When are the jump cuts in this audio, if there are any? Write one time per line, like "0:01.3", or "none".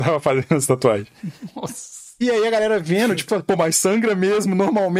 0:03.3